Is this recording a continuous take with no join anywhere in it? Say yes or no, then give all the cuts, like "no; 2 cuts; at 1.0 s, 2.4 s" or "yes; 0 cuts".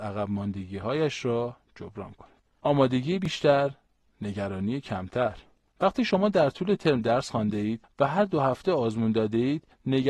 yes; 0 cuts